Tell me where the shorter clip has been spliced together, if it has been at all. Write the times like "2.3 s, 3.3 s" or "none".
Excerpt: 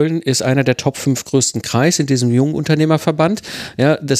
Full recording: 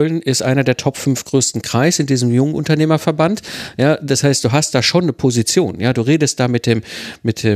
none